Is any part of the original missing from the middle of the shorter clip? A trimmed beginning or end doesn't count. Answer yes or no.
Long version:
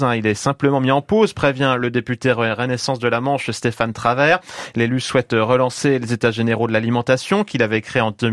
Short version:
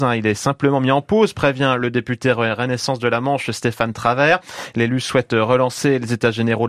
no